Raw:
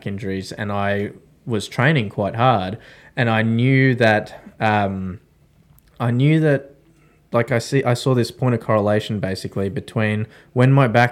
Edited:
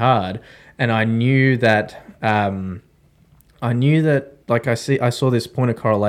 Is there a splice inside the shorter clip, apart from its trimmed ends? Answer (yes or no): yes